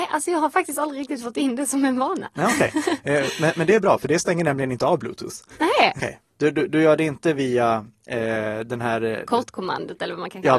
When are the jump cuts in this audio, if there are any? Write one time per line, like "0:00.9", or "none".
0:06.0